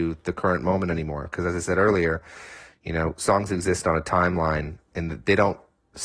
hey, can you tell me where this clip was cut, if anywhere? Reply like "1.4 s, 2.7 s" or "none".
none